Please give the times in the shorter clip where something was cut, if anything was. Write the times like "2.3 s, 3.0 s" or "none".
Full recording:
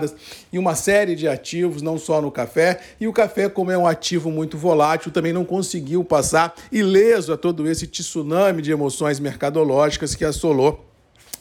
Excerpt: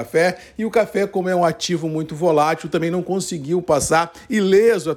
none